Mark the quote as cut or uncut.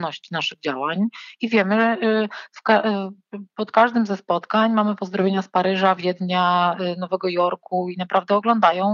uncut